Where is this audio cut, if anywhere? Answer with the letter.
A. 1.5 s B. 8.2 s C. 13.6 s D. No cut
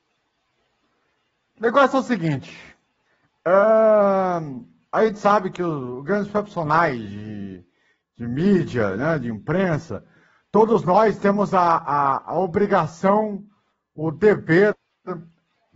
D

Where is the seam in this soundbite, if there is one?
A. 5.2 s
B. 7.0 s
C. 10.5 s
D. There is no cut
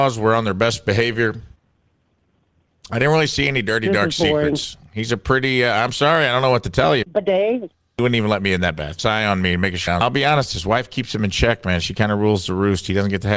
B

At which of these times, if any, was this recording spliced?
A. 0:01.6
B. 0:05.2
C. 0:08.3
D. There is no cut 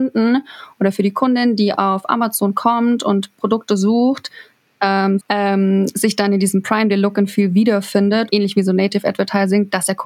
B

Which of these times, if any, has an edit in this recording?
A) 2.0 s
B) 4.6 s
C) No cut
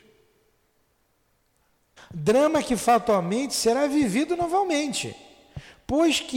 A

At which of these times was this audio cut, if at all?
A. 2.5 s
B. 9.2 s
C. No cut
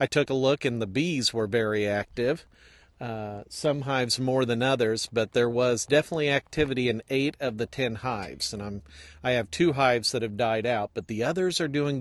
C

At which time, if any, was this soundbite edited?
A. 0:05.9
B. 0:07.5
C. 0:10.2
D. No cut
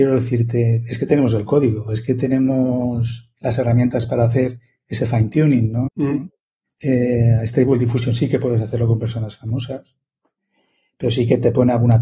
A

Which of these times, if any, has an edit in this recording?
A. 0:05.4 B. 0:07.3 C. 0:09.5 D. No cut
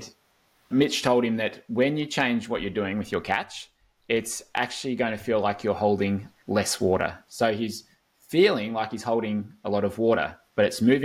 B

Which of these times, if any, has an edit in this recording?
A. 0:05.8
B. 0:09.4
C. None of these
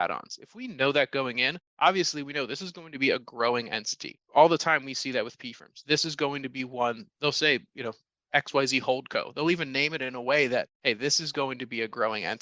C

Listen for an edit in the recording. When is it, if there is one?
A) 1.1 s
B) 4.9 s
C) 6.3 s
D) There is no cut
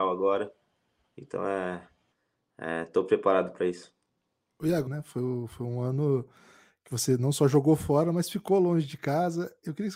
B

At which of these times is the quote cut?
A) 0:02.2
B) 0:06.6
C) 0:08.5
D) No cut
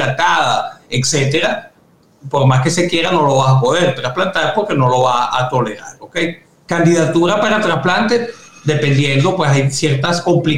B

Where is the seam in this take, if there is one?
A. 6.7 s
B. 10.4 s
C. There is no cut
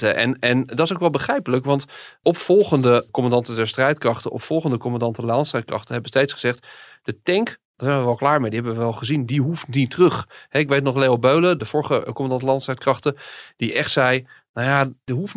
C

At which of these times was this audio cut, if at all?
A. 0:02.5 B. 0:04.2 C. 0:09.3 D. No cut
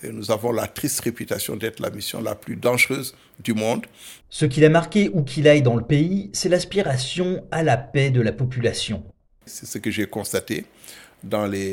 B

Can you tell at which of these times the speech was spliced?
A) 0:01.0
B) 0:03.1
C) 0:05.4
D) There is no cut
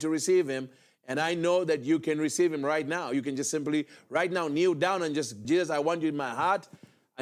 C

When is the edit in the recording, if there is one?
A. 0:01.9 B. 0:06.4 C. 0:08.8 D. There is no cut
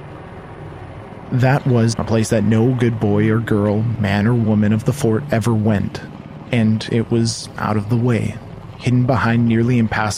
A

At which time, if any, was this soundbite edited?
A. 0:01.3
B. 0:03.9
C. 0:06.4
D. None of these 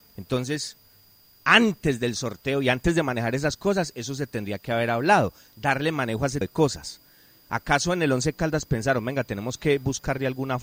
C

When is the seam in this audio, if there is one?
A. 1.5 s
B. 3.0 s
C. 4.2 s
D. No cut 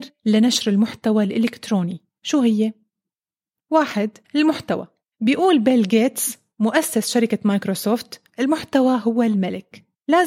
C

